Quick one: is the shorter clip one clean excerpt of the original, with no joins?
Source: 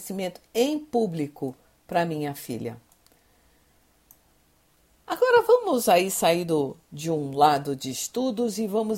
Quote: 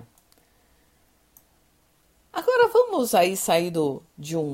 yes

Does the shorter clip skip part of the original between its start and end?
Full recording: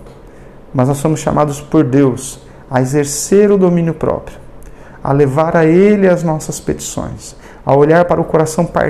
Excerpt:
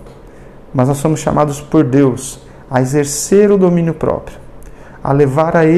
no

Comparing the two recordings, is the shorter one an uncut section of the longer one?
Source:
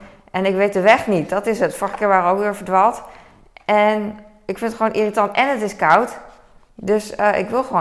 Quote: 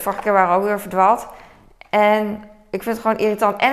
yes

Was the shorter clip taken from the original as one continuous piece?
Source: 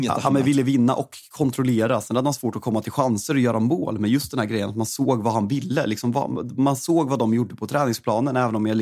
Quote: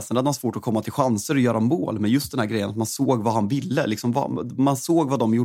yes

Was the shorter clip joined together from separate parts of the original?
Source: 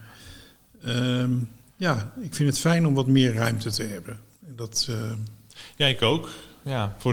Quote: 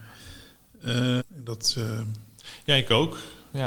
yes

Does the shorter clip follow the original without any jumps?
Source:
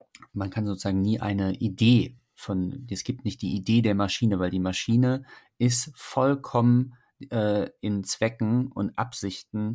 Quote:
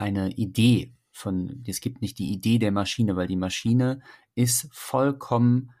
yes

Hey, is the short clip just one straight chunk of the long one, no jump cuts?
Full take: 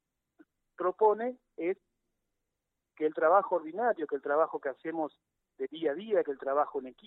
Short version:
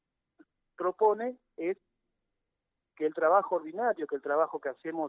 yes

